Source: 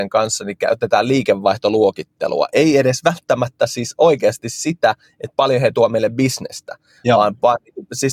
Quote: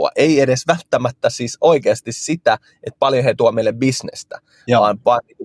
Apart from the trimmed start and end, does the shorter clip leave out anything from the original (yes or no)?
no